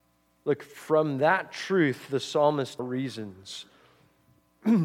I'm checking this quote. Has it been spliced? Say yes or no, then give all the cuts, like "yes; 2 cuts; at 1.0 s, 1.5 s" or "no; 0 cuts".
yes; 1 cut; at 2.8 s